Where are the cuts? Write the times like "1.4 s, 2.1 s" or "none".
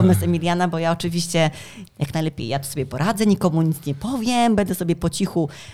none